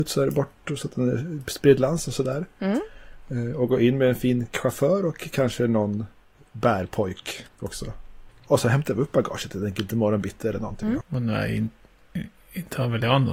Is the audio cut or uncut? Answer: cut